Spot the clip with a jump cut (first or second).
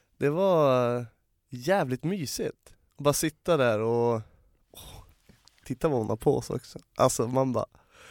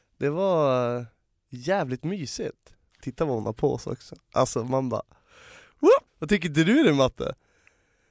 second